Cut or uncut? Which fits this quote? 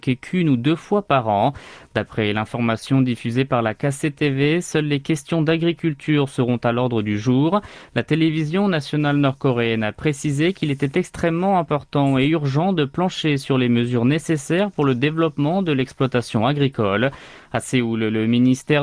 uncut